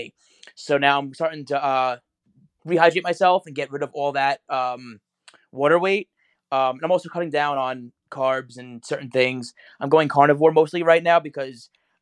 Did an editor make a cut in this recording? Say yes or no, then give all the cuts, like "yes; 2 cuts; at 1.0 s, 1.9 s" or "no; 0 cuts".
yes; 1 cut; at 2.6 s